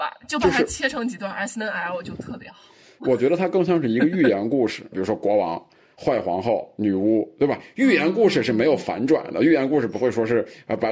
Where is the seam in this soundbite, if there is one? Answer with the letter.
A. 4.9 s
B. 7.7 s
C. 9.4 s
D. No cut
A